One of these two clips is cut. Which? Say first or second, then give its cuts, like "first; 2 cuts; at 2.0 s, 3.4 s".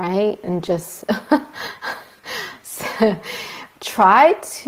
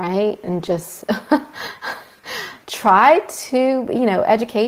second; 1 cut; at 2.6 s